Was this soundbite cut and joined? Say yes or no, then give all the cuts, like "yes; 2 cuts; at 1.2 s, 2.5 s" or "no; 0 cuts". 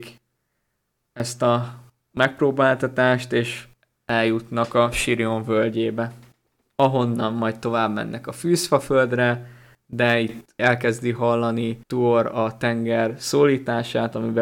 yes; 1 cut; at 11.8 s